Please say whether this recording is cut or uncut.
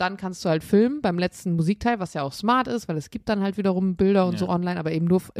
uncut